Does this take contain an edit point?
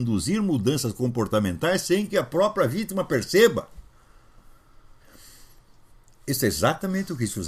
no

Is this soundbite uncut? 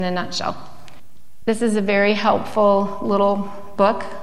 yes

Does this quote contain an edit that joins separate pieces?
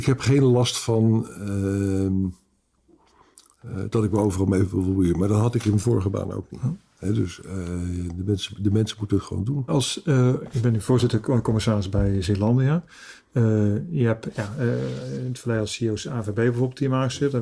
yes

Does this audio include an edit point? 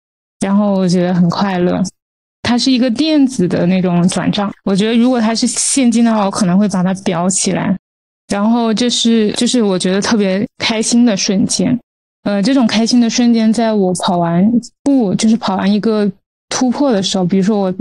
no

